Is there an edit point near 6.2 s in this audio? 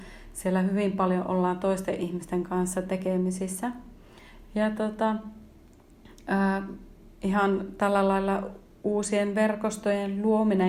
no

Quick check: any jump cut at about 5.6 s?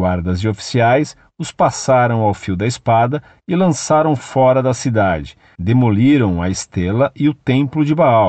yes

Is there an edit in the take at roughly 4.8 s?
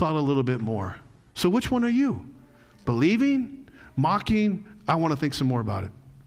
no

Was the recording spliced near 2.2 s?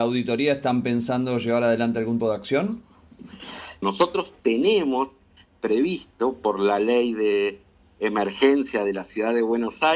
yes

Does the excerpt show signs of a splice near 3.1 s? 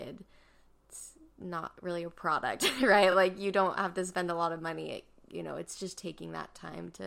no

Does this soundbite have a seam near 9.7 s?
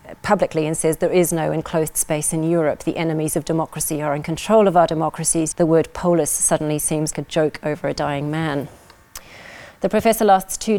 no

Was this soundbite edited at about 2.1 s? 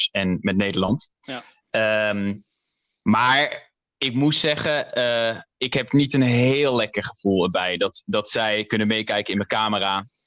no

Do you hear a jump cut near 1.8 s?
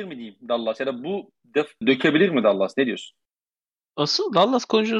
yes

